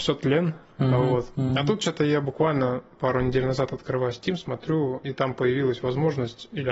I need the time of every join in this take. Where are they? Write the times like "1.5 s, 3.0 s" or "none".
none